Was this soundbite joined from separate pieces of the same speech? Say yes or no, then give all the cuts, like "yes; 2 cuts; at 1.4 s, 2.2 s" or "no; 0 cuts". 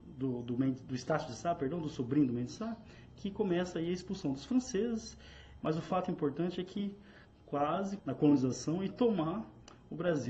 yes; 2 cuts; at 5.6 s, 8.0 s